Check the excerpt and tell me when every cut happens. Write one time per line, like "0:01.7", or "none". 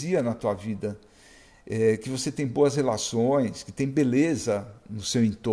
none